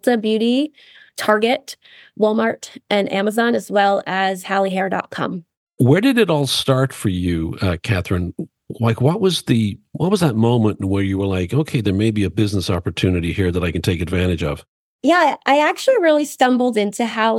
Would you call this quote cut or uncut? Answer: uncut